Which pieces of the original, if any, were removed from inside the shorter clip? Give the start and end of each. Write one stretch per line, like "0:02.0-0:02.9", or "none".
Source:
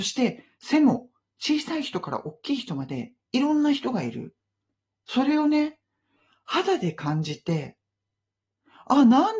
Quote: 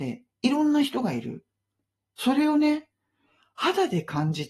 none